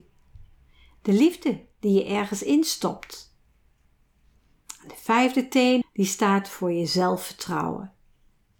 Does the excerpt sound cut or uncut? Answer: cut